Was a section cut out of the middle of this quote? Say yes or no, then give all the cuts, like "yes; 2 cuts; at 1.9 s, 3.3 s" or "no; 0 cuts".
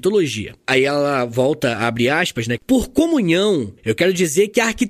yes; 1 cut; at 2.6 s